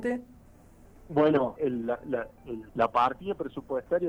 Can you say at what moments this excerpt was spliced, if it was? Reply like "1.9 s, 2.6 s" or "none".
1.6 s, 2.7 s